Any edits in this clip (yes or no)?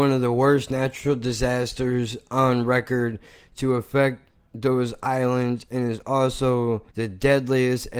yes